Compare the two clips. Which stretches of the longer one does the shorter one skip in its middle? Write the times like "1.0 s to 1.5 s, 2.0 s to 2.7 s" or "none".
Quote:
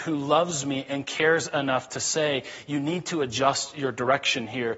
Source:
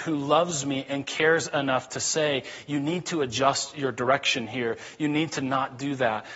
none

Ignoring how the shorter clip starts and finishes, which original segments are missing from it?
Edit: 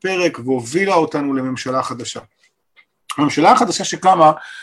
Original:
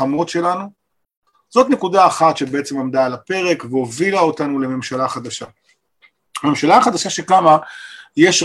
none

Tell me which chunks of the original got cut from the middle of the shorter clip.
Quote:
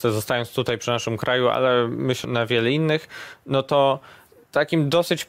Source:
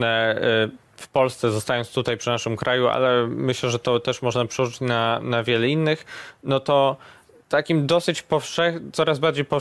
3.6 s to 5.2 s

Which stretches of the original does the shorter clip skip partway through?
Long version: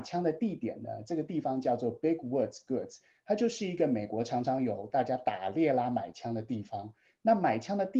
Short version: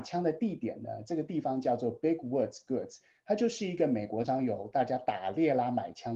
4.2 s to 4.4 s

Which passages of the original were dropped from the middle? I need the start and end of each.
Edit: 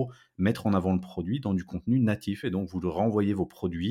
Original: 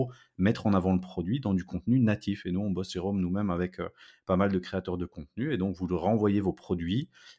2.4 s to 5.5 s

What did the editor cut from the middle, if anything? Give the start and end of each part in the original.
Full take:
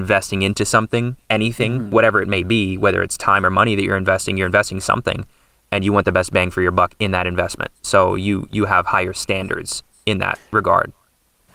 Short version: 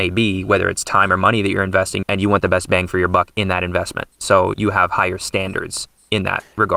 4.4 s to 5.7 s, 8.2 s to 8.5 s

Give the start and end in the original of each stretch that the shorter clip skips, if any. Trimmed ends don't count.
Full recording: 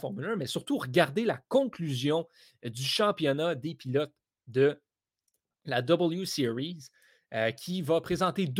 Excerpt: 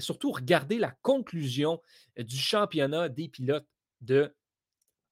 none

